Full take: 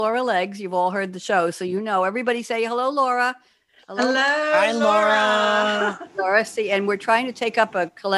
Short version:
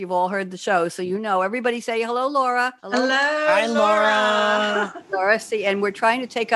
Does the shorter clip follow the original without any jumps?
no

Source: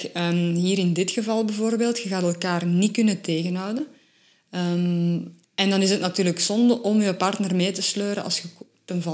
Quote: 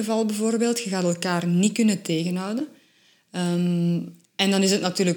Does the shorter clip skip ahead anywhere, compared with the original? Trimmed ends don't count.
no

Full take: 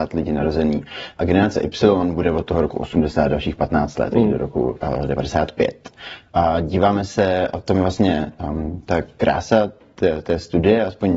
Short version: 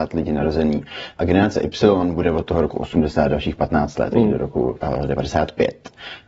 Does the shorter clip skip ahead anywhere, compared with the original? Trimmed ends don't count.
no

